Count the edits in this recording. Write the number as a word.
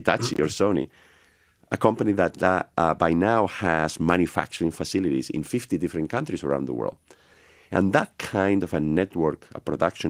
zero